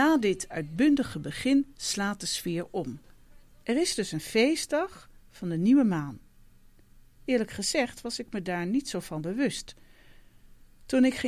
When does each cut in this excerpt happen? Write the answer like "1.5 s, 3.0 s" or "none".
3.6 s